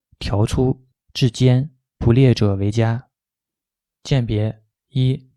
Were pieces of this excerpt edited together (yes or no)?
no